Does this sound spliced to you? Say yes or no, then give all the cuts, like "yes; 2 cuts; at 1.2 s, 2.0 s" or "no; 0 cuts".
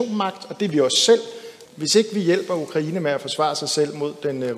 yes; 1 cut; at 1.7 s